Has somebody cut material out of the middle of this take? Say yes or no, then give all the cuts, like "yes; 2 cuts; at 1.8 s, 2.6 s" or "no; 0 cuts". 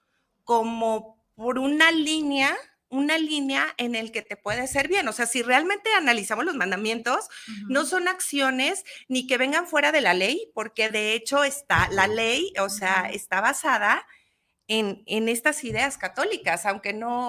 no; 0 cuts